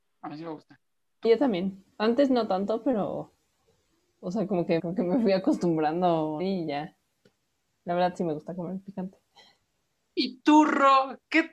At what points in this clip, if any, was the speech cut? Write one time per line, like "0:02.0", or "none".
0:01.2
0:04.8
0:06.4